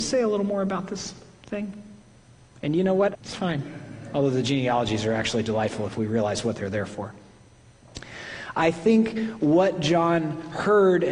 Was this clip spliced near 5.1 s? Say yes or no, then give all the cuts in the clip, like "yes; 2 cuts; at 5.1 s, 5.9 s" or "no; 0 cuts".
no; 1 cut; at 3.1 s